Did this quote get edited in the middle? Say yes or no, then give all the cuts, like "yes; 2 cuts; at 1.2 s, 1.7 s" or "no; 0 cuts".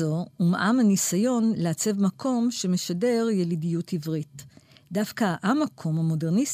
no; 0 cuts